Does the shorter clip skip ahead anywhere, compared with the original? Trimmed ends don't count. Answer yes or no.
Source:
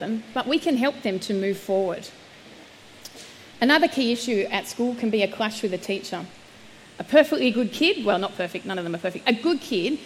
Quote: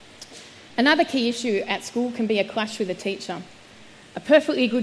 no